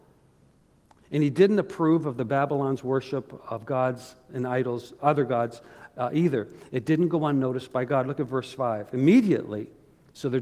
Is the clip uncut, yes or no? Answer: yes